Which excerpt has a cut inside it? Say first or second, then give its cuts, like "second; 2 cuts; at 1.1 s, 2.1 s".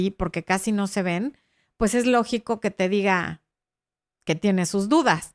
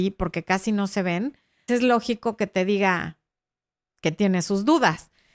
second; 1 cut; at 1.7 s